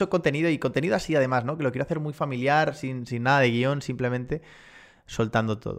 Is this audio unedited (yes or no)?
yes